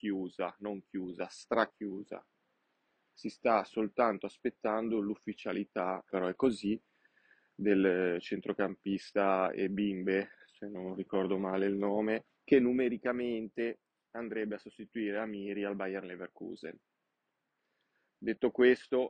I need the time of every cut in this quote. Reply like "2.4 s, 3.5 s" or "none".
6.1 s, 12.4 s